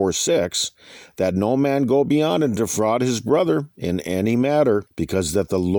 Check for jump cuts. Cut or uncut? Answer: cut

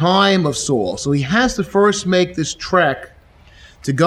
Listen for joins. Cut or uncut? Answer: uncut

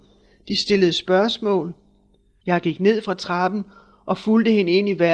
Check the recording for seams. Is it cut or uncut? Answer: cut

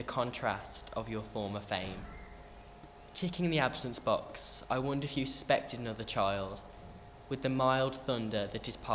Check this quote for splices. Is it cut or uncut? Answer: uncut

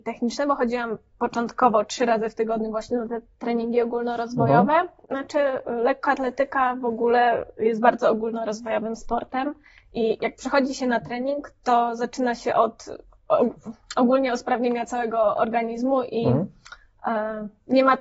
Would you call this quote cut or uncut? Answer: cut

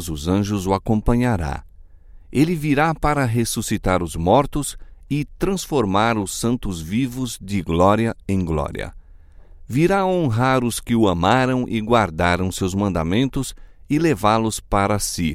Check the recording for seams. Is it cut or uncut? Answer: uncut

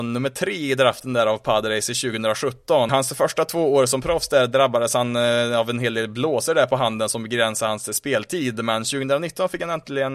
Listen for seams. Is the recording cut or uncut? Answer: cut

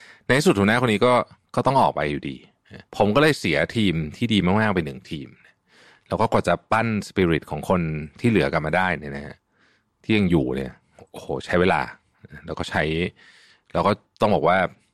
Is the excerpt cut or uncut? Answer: cut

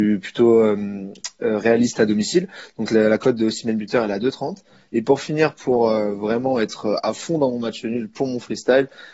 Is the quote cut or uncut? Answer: uncut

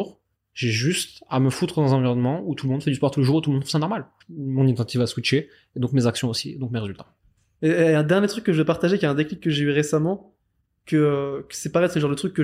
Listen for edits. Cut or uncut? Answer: cut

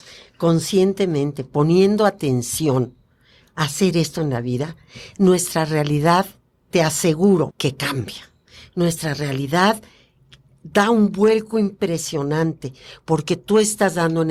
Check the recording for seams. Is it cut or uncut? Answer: cut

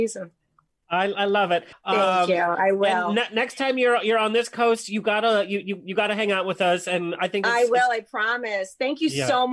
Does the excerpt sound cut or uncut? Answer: cut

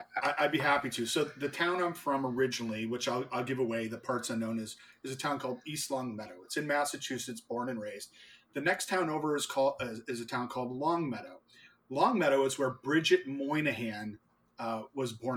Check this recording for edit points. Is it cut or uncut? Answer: uncut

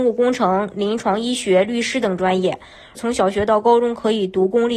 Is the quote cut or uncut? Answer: cut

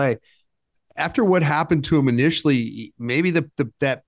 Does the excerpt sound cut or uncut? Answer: uncut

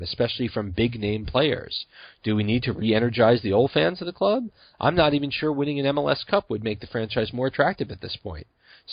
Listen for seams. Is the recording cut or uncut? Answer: cut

